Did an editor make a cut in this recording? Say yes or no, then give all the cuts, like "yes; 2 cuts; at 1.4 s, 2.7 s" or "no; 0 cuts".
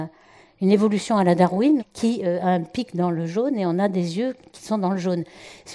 yes; 1 cut; at 1.8 s